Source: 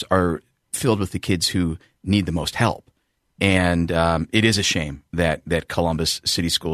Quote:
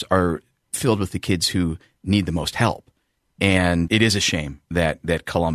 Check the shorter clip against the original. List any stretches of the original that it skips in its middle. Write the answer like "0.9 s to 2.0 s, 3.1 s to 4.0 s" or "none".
3.9 s to 4.3 s